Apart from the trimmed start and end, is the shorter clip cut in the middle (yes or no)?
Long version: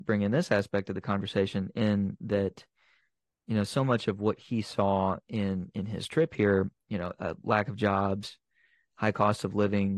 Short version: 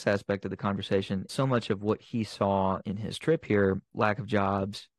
yes